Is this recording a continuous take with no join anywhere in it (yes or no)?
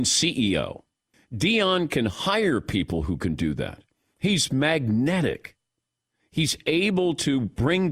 no